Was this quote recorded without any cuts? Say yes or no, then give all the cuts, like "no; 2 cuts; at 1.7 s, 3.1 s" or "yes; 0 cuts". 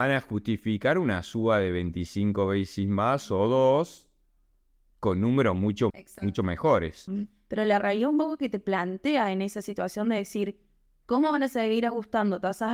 no; 2 cuts; at 5.9 s, 7.1 s